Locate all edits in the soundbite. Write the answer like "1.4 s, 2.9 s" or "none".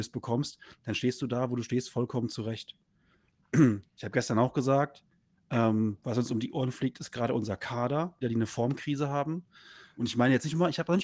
8.2 s, 10.0 s